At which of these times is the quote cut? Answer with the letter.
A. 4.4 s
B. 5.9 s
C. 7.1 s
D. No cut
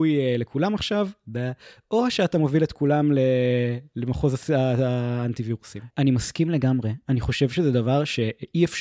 B